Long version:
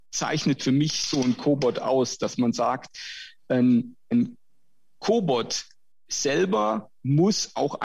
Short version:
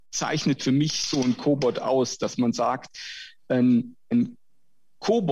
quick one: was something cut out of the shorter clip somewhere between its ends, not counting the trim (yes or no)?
no